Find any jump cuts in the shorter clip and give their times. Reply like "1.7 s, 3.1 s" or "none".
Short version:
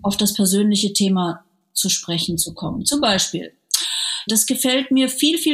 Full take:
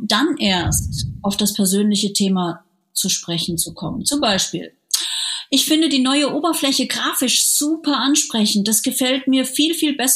4.3 s

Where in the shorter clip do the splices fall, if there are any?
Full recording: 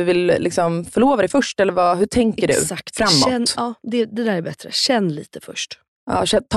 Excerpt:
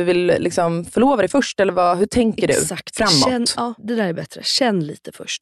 3.8 s

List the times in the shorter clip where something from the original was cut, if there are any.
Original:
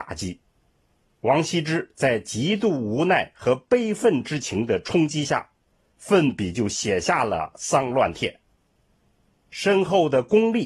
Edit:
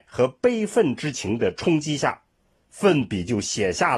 none

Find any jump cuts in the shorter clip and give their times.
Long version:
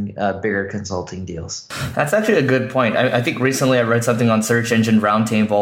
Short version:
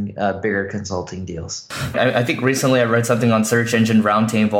1.9 s

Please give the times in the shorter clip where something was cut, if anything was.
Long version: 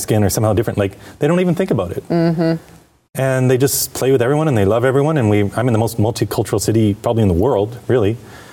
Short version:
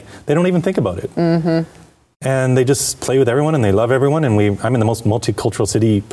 none

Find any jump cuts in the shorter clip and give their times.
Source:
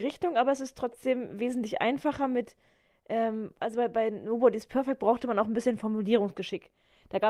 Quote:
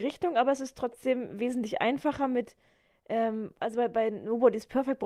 none

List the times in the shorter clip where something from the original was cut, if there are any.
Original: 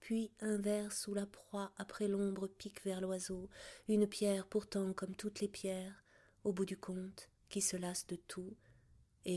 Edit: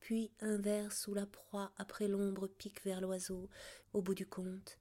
3.8 s

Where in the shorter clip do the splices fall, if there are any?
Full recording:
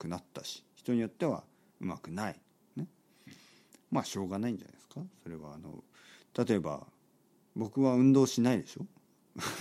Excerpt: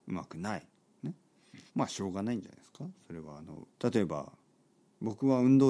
1.7 s, 3.7 s

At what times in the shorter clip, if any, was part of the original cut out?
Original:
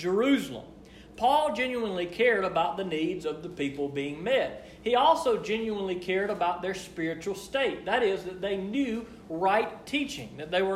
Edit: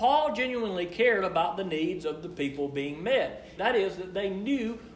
3.6 s

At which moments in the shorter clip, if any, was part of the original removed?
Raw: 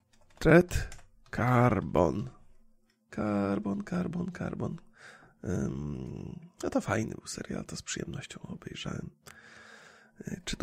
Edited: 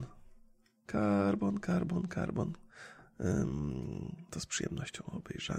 4.3 s

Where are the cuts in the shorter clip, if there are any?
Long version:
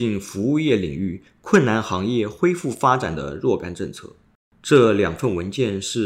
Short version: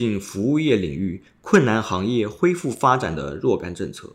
none

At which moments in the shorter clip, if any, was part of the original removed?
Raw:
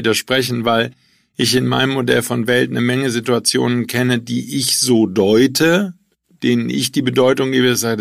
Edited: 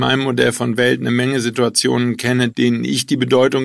2.5 s

